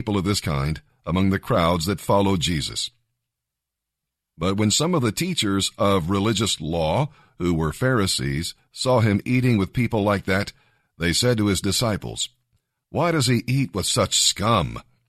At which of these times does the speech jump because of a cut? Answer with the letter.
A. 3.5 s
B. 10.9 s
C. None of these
C